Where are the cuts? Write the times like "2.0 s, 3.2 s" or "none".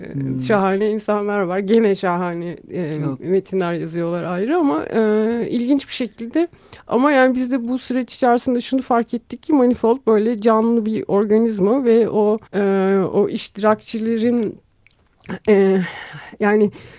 12.5 s

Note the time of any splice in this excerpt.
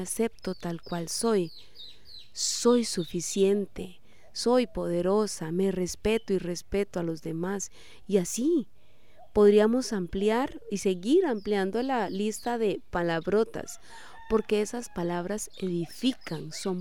none

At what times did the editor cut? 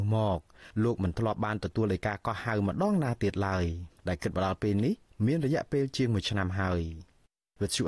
4.0 s

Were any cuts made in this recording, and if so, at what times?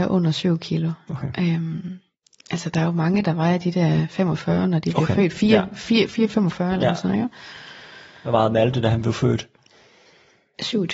6.1 s

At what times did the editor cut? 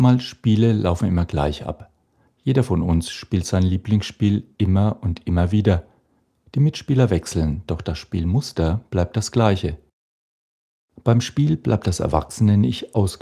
none

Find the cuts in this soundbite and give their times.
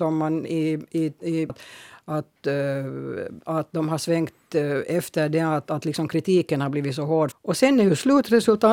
1.5 s, 7.3 s

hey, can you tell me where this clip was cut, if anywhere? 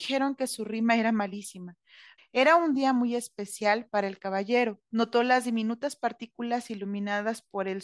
2.2 s, 4.9 s

